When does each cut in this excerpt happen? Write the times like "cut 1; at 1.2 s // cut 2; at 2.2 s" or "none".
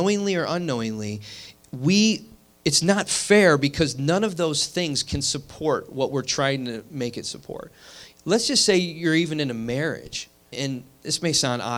cut 1; at 10.5 s